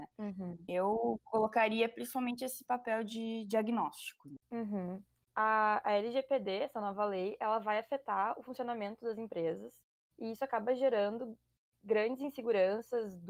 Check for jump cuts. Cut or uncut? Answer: uncut